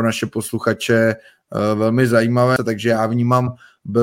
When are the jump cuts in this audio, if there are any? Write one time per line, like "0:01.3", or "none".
0:02.6